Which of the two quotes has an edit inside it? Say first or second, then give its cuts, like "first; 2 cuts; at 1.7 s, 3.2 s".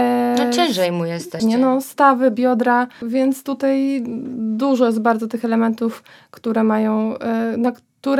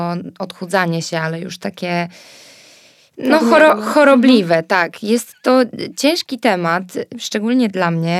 first; 2 cuts; at 1.4 s, 3.0 s